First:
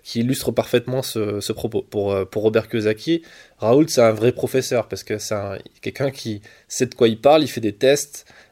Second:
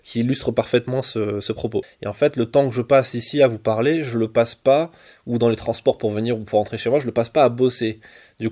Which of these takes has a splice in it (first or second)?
second